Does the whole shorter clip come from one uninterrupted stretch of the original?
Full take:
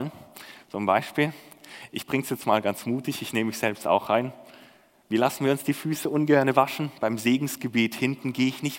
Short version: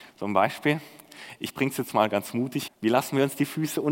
no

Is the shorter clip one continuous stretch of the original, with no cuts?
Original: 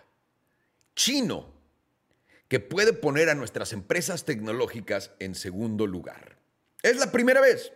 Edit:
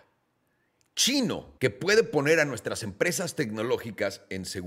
no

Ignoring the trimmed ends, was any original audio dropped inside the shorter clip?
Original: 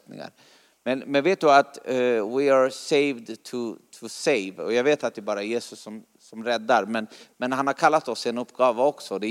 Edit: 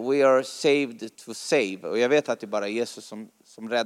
yes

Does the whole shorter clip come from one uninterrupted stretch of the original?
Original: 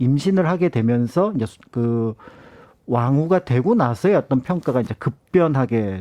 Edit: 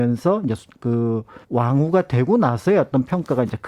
no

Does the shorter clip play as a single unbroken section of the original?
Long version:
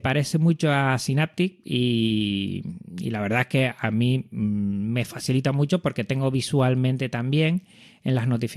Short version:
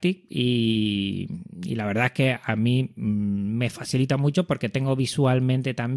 yes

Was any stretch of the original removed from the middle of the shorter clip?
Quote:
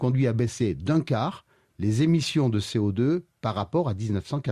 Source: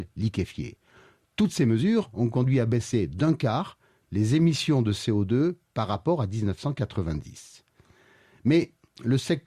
no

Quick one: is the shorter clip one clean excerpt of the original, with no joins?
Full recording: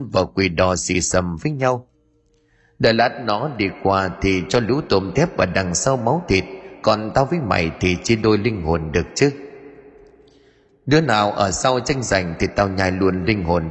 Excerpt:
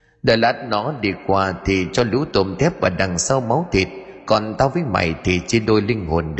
yes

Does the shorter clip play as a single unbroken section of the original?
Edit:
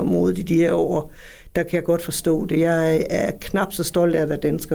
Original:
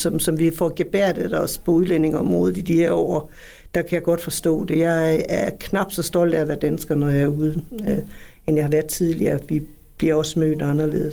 yes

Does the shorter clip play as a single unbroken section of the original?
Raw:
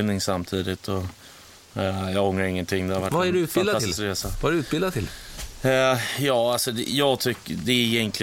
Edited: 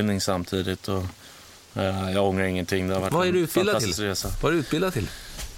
yes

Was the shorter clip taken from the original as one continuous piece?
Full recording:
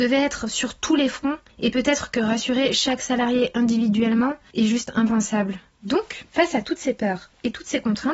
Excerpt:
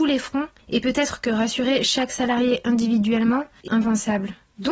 no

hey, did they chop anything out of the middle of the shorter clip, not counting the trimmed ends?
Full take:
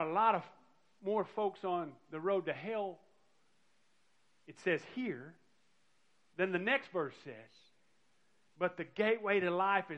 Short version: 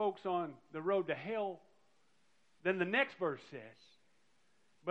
yes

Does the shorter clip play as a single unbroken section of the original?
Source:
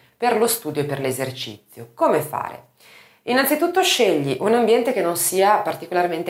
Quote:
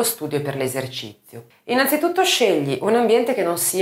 no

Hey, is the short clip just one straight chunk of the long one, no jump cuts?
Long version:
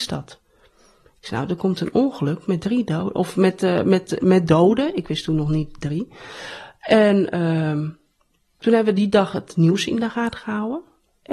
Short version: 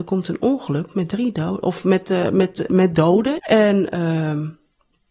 no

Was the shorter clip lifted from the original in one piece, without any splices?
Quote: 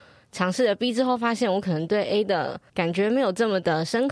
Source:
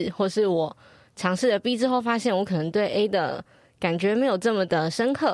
no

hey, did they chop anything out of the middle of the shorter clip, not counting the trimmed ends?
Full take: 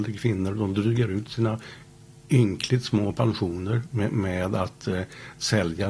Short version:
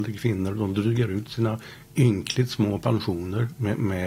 yes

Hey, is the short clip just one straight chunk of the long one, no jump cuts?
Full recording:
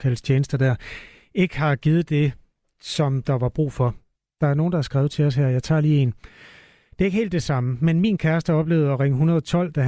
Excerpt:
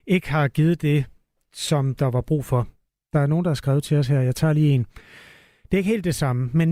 yes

